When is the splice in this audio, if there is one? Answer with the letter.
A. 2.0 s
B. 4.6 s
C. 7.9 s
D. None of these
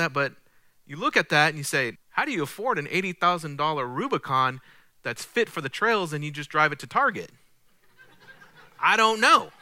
A